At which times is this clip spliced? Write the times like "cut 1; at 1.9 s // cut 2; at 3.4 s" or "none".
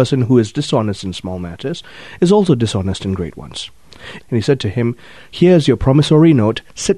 cut 1; at 4.2 s